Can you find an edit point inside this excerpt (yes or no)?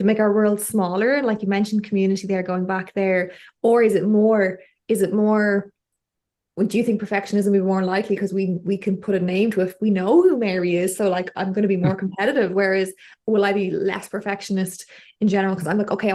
no